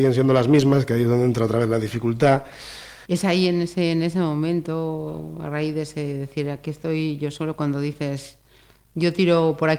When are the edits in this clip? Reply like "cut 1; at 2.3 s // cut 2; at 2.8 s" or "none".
cut 1; at 3.0 s